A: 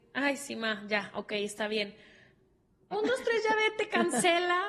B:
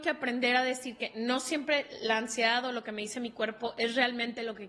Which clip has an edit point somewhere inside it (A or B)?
A